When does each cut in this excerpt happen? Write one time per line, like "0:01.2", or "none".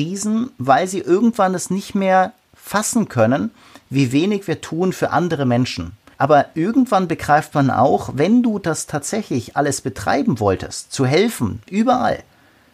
0:06.1